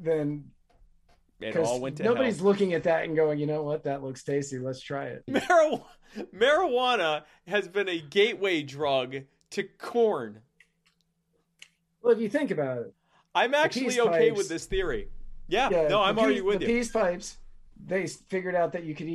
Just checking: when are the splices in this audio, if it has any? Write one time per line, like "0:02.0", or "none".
0:05.3